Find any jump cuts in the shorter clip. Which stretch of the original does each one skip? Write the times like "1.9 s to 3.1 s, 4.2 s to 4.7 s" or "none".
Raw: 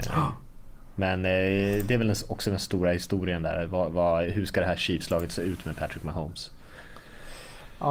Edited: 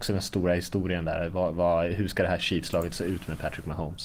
none